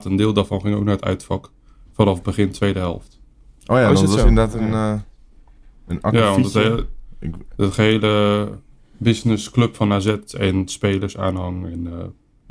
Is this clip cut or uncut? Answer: uncut